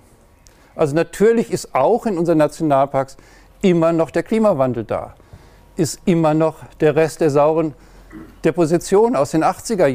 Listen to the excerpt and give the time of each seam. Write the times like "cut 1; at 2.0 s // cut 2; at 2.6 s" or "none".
none